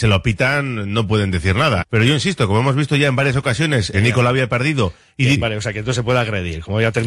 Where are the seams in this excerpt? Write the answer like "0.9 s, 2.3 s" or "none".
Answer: 1.8 s, 3.9 s, 5.3 s